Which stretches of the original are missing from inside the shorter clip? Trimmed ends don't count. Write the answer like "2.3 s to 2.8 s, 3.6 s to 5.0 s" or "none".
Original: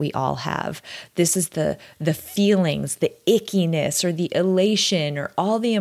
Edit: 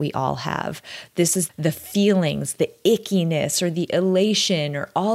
1.5 s to 1.9 s